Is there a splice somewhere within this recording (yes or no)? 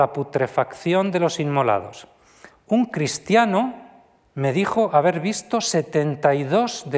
yes